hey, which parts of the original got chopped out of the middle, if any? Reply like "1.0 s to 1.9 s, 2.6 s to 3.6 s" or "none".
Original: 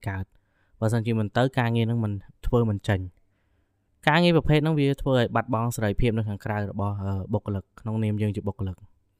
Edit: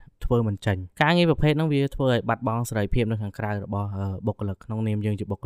3.1 s to 4.0 s, 7.6 s to 7.7 s